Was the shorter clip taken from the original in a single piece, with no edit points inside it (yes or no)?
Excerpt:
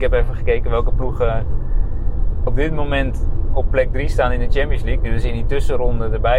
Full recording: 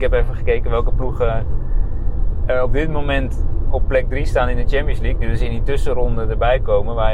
no